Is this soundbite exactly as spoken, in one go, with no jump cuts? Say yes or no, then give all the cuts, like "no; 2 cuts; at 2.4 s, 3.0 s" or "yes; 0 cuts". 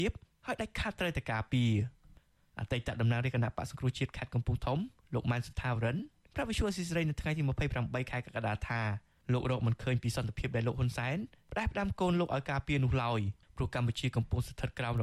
yes; 0 cuts